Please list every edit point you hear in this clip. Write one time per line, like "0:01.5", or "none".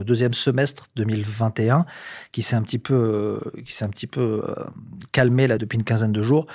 0:05.6